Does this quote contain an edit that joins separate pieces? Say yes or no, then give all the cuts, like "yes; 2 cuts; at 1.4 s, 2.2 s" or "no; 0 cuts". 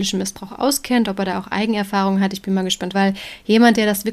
yes; 1 cut; at 2.9 s